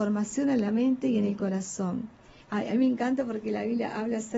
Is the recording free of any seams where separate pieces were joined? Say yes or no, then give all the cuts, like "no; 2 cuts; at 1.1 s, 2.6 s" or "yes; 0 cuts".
no; 1 cut; at 2.4 s